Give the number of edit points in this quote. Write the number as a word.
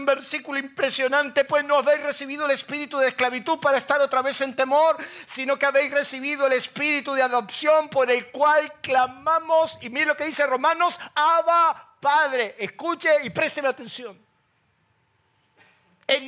zero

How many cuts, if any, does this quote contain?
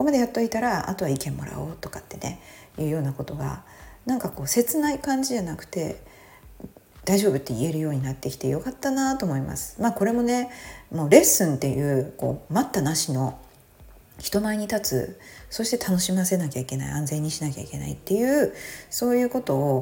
zero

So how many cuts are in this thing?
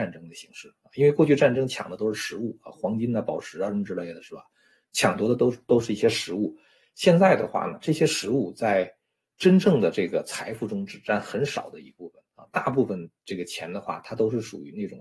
zero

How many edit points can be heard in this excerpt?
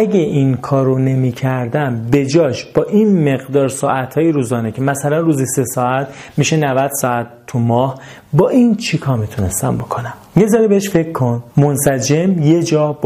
two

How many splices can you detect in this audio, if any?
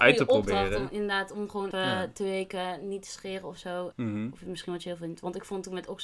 two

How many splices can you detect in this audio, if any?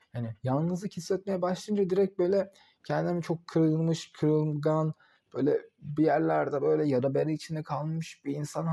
zero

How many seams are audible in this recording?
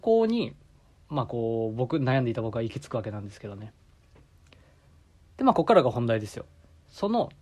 zero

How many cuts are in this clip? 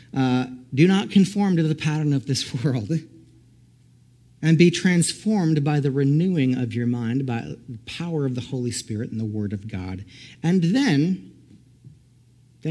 zero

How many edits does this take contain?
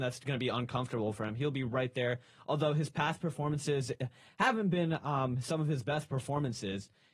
zero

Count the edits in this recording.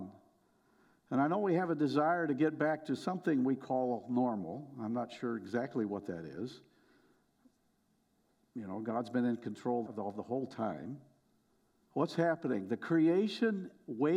two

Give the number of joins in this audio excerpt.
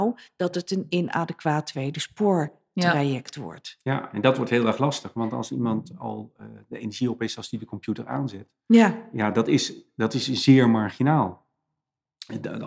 zero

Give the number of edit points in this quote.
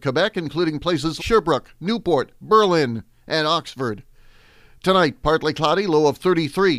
one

